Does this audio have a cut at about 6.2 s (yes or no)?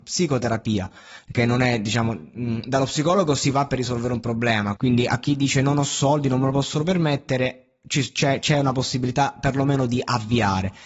no